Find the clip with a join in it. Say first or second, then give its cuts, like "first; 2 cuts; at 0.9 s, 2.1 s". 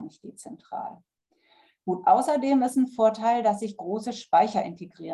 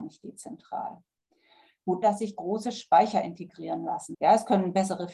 second; 2 cuts; at 2.0 s, 4.1 s